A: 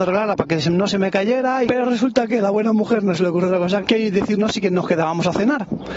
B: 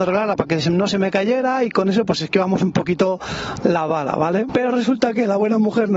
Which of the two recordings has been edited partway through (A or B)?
A